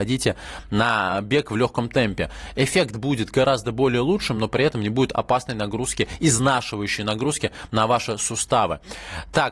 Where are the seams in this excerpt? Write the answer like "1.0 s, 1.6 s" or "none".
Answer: none